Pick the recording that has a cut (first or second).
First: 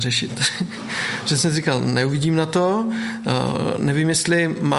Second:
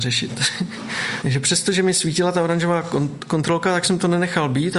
second